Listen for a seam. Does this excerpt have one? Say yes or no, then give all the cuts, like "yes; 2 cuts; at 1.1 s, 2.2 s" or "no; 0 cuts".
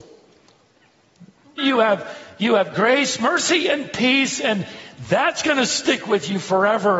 yes; 1 cut; at 1.6 s